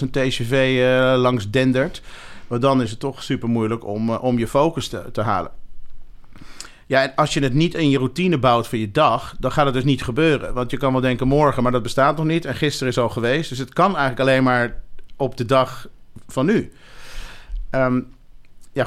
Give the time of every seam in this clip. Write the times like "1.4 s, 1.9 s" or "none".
none